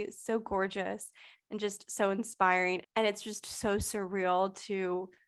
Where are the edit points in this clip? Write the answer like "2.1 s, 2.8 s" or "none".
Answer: 2.8 s